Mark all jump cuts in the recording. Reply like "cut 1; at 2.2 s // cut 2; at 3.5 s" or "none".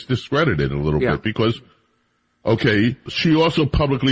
cut 1; at 3.1 s